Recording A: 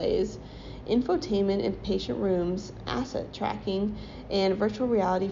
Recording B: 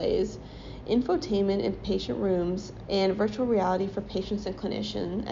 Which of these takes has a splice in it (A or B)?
B